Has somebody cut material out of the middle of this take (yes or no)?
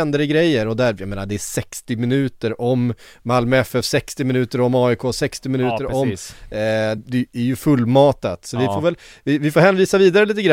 yes